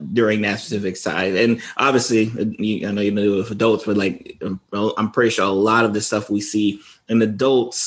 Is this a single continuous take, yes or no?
yes